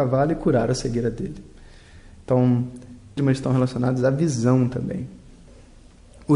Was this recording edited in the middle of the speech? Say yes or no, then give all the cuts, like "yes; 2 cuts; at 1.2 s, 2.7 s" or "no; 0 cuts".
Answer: yes; 1 cut; at 3.2 s